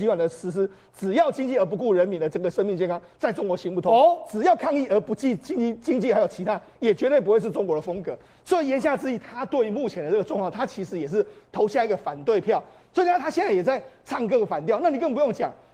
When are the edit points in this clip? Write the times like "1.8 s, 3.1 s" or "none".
none

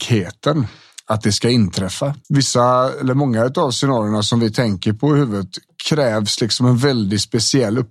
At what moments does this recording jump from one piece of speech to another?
2.2 s

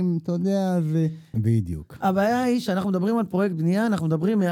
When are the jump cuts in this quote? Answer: 1.3 s

